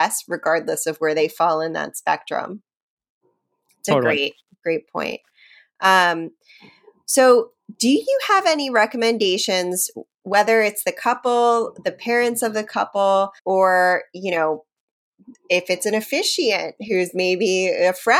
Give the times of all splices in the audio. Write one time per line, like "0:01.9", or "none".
0:13.4